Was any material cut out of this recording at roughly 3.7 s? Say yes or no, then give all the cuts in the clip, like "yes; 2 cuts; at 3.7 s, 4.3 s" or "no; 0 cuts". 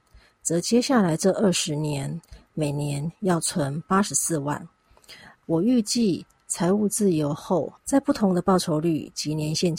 no; 2 cuts; at 5.4 s, 7.8 s